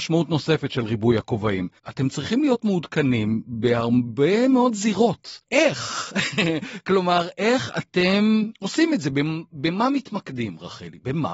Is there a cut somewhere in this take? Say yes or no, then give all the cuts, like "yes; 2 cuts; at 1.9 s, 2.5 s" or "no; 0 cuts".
yes; 2 cuts; at 1.8 s, 5.4 s